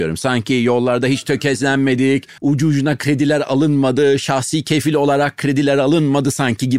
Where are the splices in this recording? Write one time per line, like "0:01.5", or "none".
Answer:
0:02.4